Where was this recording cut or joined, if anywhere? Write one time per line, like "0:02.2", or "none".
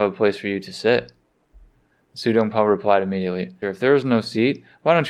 0:03.6

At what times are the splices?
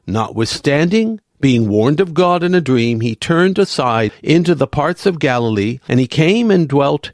none

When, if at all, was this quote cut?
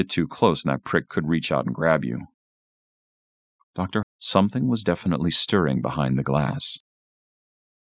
0:04.0

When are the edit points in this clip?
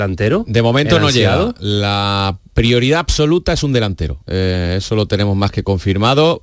none

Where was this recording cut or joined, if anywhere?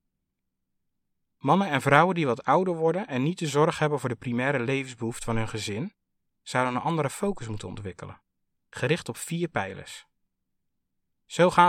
none

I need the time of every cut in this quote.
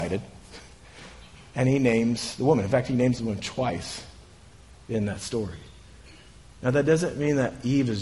none

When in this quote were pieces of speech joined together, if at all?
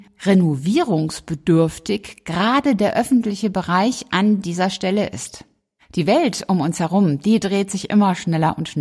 none

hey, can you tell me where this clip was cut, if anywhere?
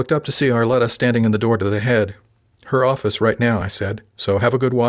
none

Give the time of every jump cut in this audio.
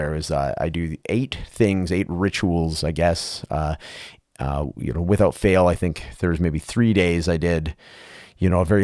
none

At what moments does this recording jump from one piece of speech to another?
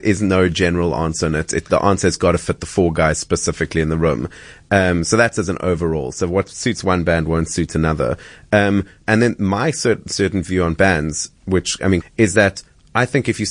0:09.0
0:12.0

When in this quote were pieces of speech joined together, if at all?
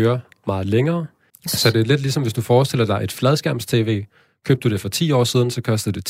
0:01.3

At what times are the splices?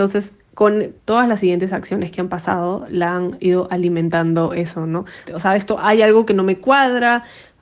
0:01.0
0:05.3

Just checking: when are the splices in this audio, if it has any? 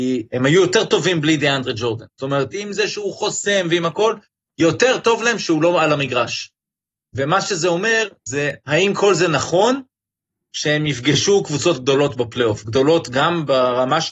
0:02.5

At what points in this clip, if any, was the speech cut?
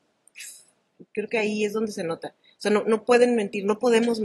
none

